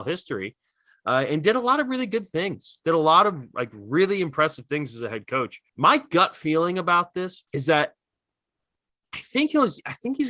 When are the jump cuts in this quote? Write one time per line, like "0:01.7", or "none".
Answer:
0:05.7
0:07.5

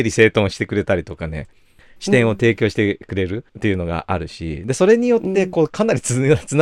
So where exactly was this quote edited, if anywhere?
0:03.5

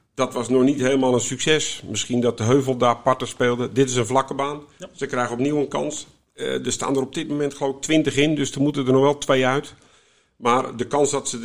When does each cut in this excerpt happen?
none

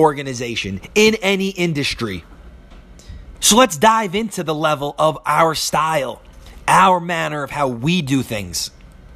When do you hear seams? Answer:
0:03.3

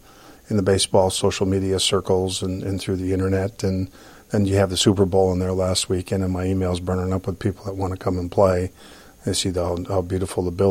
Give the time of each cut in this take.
none

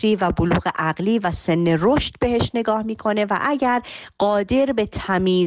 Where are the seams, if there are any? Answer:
none

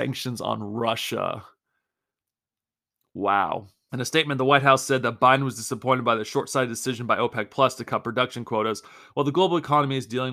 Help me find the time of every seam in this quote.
0:03.9

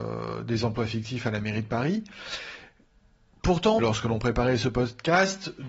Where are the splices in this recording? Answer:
0:03.8

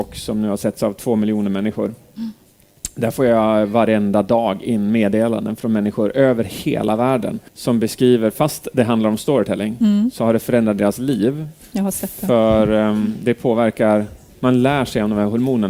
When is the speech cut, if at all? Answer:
0:07.5

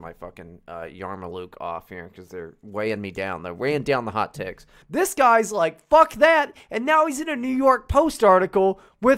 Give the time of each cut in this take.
0:04.8

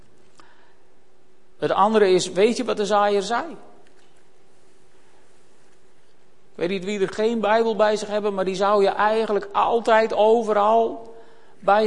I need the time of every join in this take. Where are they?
0:06.5

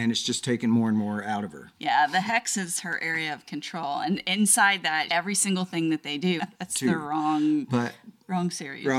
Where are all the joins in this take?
0:05.1
0:06.4

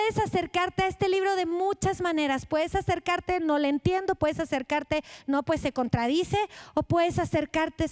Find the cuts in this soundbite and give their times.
none

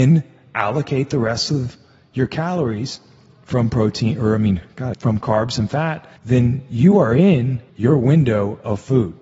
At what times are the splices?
0:04.9
0:06.2
0:07.7

